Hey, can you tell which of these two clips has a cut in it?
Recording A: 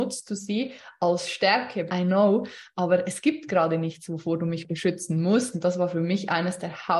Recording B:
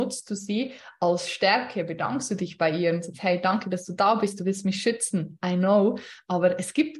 A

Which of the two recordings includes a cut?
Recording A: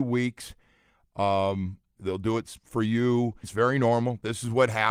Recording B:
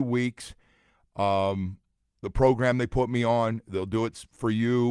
A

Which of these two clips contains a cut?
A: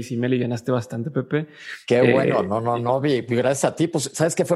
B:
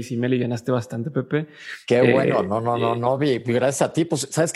A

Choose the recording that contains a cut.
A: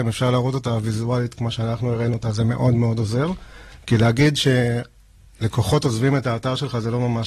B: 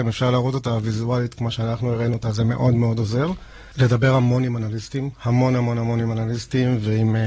B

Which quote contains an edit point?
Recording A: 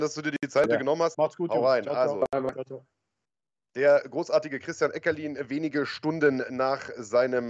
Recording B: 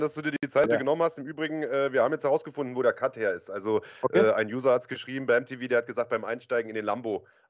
A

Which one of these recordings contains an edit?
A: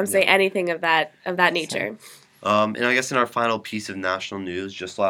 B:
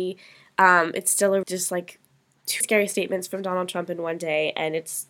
B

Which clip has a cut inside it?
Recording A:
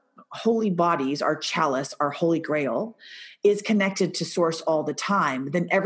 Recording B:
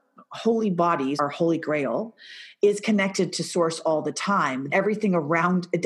B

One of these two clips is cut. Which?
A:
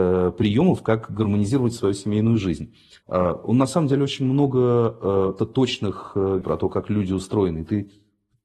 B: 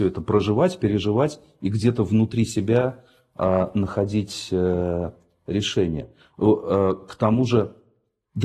A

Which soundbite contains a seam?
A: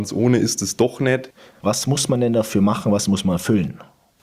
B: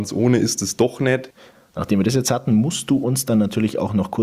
A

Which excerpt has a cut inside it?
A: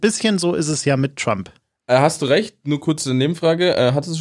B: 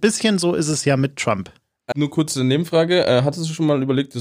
B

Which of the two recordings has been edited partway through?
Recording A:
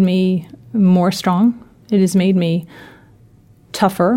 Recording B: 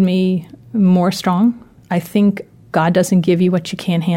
B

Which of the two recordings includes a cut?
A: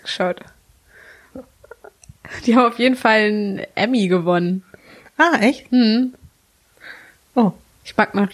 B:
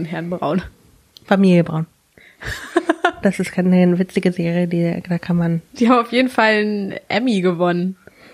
B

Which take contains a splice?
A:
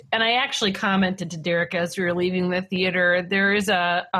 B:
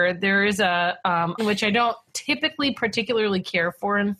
B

